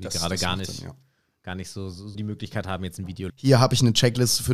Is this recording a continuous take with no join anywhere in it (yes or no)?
no